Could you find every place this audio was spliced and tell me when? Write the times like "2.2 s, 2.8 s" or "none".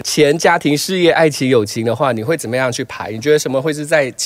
none